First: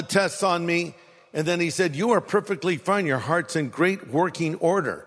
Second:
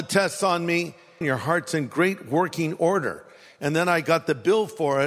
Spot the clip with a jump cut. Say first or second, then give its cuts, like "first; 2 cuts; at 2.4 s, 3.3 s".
second; 1 cut; at 1.2 s